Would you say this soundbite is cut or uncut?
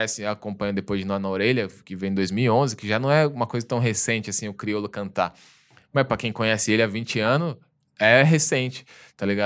uncut